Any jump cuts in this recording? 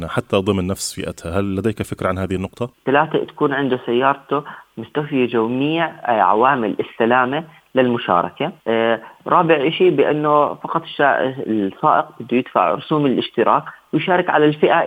yes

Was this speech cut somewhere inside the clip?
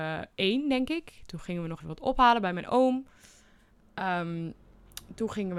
yes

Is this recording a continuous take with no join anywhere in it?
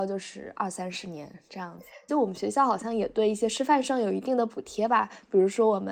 no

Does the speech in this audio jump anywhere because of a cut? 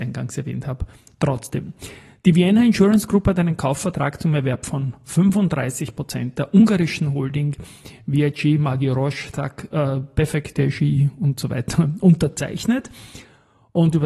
no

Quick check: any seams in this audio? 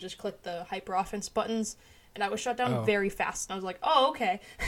no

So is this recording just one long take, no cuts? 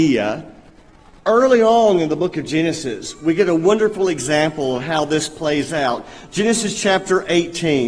yes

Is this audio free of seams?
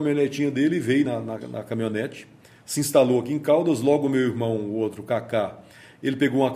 yes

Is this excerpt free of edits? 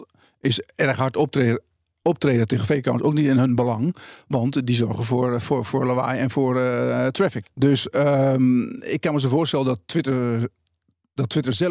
yes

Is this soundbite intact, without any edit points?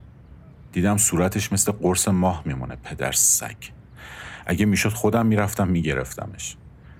yes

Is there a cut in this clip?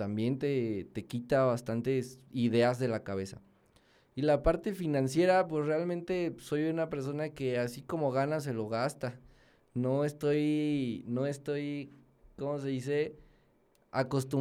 no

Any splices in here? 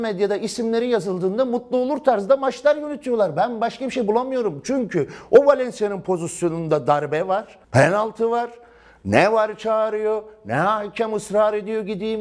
yes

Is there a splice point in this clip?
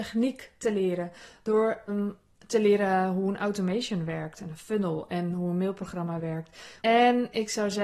yes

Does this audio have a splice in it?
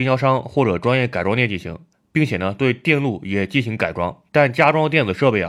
yes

